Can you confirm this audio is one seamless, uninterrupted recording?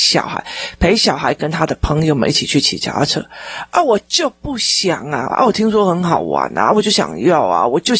no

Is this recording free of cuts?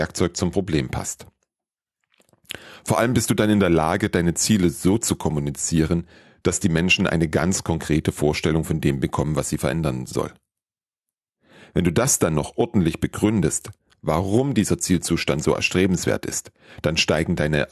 yes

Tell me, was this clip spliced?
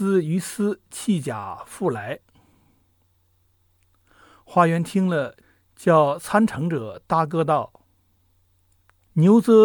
no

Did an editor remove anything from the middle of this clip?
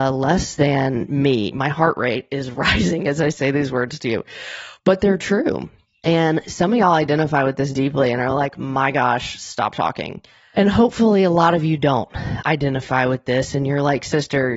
no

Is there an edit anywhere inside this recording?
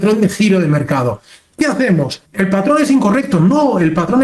yes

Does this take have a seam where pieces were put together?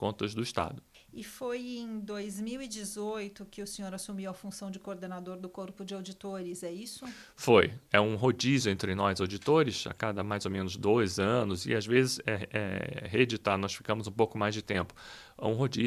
no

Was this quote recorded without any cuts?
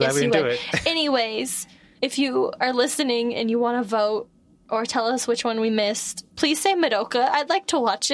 yes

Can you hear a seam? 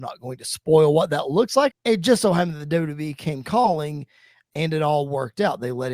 yes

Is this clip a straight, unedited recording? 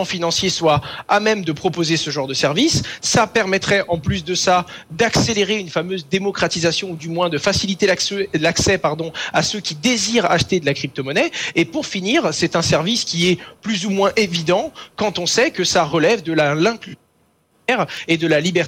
yes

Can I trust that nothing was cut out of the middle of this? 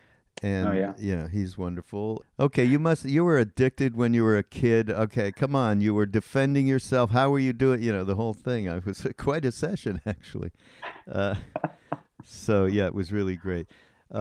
no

